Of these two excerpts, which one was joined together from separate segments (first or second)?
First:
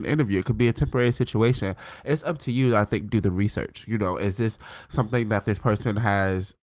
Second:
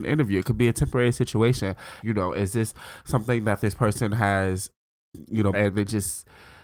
second